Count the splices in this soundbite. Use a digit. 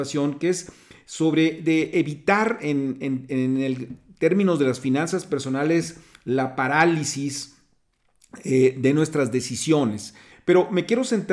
1